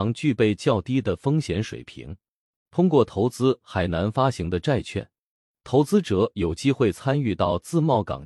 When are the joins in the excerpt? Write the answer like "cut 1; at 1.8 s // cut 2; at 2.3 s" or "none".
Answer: cut 1; at 2.6 s